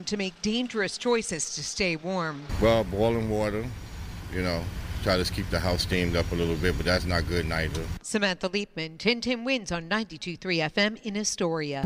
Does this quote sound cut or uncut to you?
cut